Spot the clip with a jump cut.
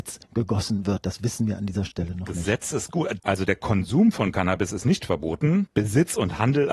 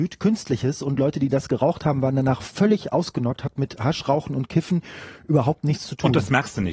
first; 1 cut; at 3.2 s

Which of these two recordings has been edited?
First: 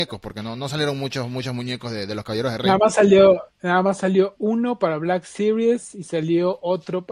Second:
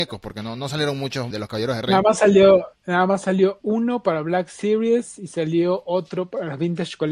second; 1 cut; at 1.3 s

